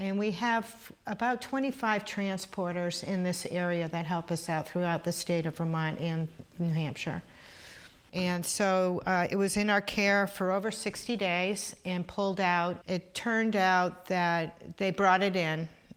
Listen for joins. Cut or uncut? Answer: cut